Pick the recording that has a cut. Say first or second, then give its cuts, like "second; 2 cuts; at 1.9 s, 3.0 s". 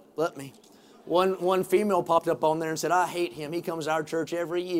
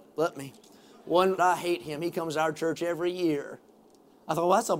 second; 1 cut; at 1.4 s